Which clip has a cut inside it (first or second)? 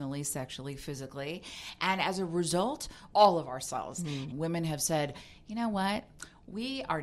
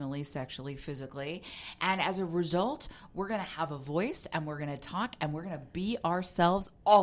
first